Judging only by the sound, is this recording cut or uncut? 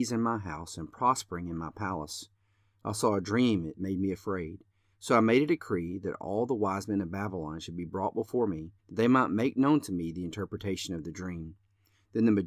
cut